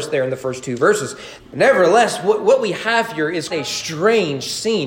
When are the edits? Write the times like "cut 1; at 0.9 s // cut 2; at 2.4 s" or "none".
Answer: cut 1; at 1.4 s // cut 2; at 3.5 s